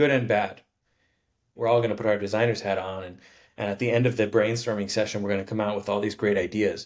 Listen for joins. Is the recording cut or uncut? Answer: cut